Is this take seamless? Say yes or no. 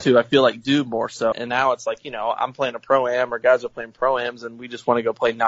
no